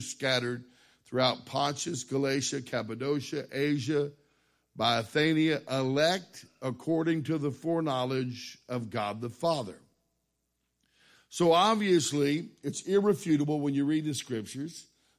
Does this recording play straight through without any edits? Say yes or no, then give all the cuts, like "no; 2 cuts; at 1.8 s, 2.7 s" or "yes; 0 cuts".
yes; 0 cuts